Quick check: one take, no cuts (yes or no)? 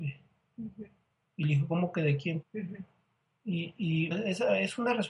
no